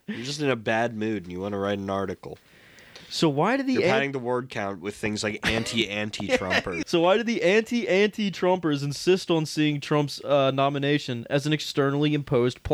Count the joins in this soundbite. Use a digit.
1